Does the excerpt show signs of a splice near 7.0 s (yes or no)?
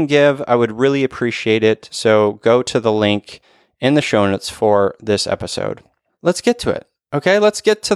no